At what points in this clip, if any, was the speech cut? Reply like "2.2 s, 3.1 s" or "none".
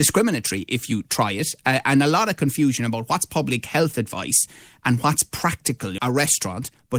6.0 s